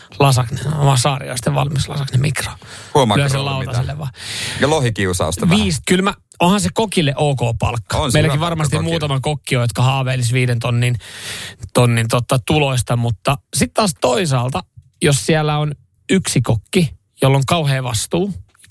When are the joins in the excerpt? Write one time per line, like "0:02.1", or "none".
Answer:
0:05.8